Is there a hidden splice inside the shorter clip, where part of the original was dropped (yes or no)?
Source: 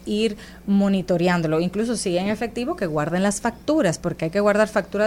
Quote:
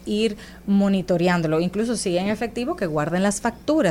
no